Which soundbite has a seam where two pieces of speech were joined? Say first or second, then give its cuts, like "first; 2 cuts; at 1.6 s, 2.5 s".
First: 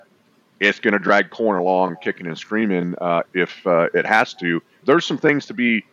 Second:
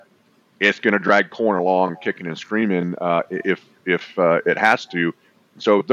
first; 2 cuts; at 3.2 s, 4.8 s